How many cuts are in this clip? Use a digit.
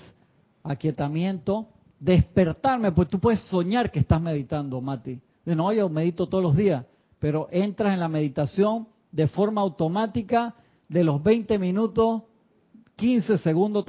0